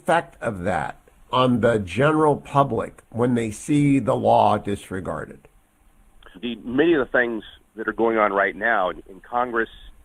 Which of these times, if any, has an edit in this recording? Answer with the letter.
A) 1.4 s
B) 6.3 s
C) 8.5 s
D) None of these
B